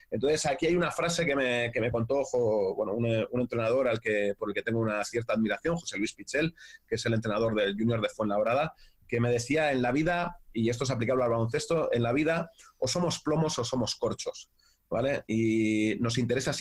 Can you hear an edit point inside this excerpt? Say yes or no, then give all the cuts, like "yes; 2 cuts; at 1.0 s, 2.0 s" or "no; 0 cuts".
no; 0 cuts